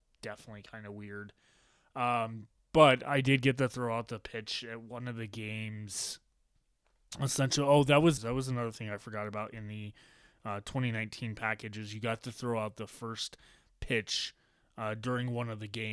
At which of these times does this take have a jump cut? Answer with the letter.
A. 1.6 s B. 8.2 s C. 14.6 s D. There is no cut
B